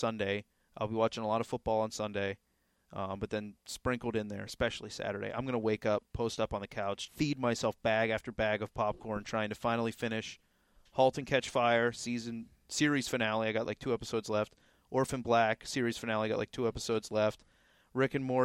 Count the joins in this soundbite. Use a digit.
1